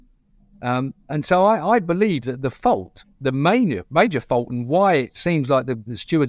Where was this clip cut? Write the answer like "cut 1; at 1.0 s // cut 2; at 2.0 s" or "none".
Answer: none